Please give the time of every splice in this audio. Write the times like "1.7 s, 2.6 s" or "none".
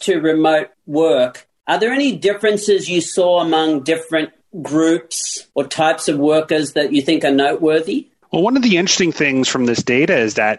5.5 s